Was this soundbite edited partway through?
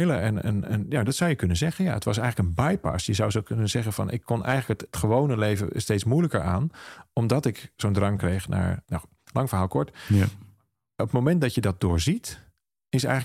yes; 2 cuts; at 4.9 s, 8.8 s

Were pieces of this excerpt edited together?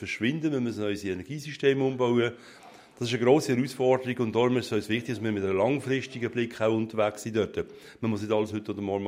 no; 0 cuts

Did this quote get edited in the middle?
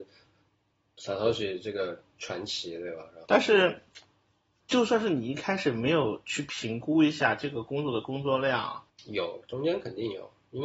yes; 2 cuts; at 3.2 s, 8.9 s

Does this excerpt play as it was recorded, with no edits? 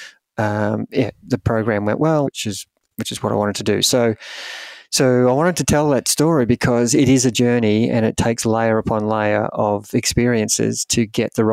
no; 1 cut; at 2.2 s

